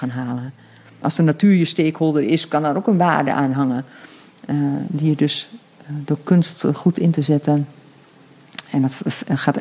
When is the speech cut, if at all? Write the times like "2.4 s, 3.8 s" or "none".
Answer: 1.0 s